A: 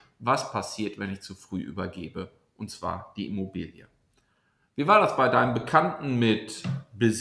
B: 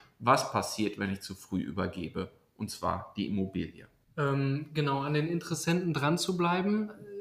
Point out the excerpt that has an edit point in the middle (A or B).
B